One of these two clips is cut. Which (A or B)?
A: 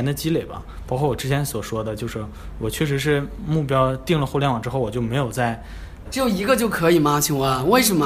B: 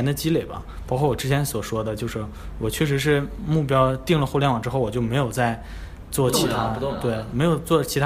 A